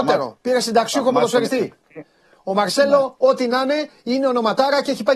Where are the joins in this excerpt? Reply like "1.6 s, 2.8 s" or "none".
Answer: none